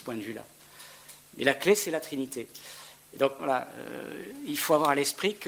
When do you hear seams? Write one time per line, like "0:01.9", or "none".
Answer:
0:03.4